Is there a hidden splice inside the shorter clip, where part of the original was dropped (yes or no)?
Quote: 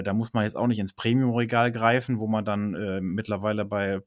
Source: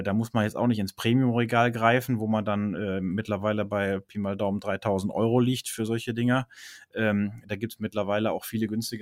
no